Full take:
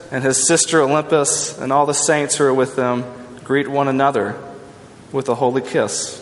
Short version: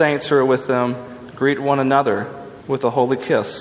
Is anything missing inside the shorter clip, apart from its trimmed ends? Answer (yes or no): yes